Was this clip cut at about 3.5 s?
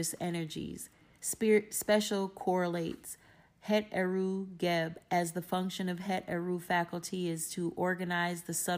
no; 1 cut; at 1.1 s

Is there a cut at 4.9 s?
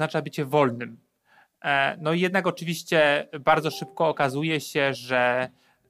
no; 0 cuts

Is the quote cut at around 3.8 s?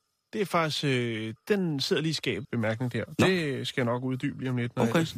no; 2 cuts; at 1.4 s, 2.4 s

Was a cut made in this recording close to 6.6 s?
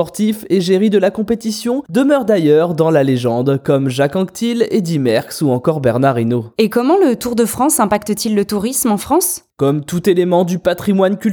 no; 0 cuts

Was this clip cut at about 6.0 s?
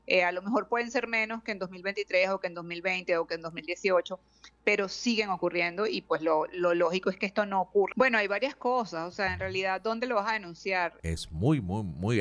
no; 2 cuts; at 7.9 s, 11.0 s

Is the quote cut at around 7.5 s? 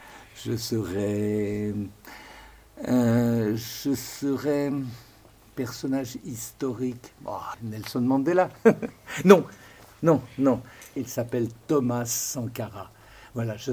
yes; 2 cuts; at 7.5 s, 11.0 s

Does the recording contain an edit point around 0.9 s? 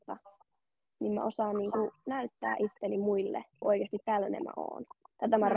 no; 1 cut; at 3.6 s

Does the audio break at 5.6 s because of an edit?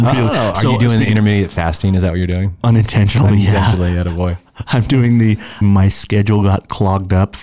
yes; 1 cut; at 5.6 s

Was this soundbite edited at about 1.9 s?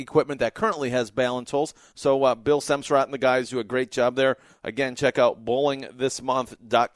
no; 0 cuts

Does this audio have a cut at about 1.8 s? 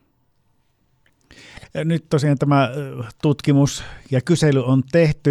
no; 0 cuts

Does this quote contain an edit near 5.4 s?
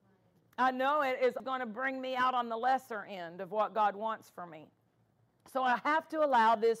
no; 1 cut; at 1.4 s

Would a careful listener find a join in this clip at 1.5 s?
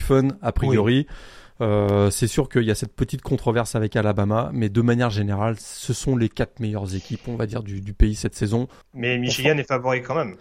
no; 1 cut; at 8.8 s

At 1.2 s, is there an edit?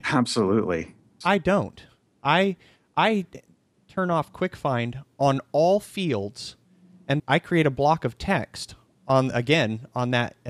yes; 2 cuts; at 1.2 s, 7.2 s

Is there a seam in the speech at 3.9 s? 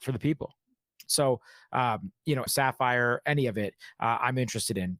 no; 2 cuts; at 1.1 s, 2.5 s

